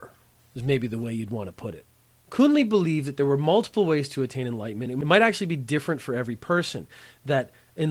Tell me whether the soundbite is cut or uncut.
uncut